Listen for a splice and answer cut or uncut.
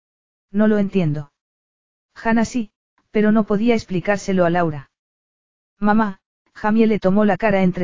cut